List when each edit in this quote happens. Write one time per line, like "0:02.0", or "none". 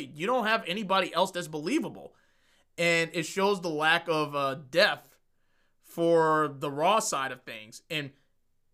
none